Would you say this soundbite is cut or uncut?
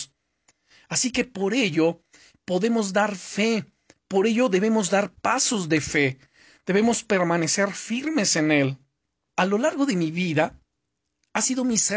cut